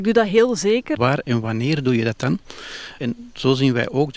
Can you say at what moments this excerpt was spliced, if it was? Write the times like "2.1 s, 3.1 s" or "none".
1.0 s, 3.0 s